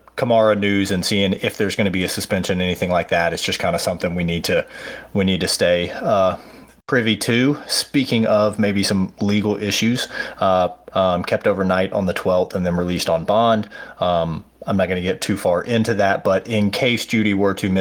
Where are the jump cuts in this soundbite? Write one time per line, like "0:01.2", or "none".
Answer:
0:10.9